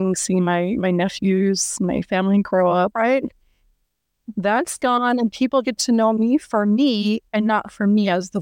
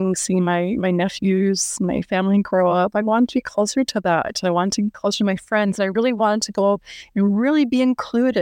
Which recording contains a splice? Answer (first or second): first